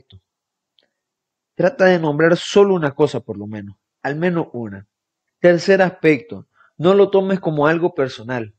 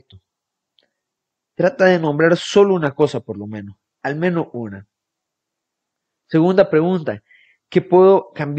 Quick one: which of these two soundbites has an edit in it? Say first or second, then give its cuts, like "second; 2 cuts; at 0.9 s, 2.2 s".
first; 1 cut; at 5.3 s